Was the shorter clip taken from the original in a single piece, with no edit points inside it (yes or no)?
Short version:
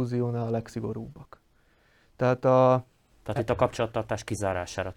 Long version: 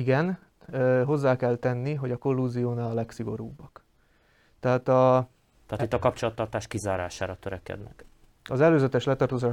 yes